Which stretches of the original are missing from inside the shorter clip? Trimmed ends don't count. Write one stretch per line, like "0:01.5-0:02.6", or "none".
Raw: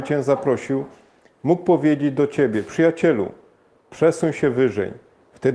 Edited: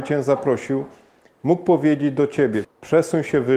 0:02.6-0:03.7